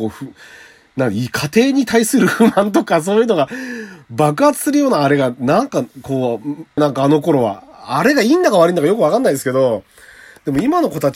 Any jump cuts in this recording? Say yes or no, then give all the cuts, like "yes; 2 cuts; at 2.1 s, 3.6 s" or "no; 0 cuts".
yes; 1 cut; at 6.8 s